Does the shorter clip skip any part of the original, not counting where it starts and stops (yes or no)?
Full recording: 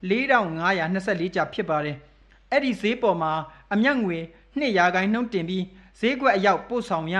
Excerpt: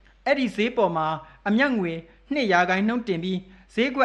no